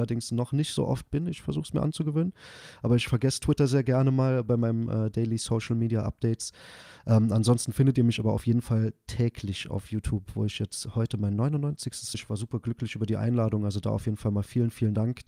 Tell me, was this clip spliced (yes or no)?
yes